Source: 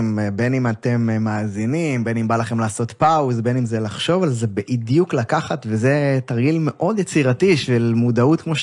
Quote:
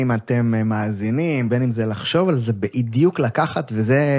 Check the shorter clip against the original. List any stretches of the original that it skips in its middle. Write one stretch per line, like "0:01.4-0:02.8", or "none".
0:02.0-0:03.4